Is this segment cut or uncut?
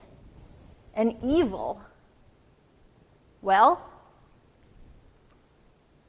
uncut